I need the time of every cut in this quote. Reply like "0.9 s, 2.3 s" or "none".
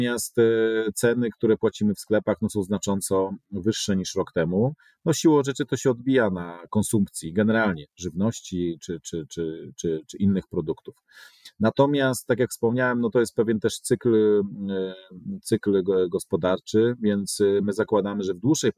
none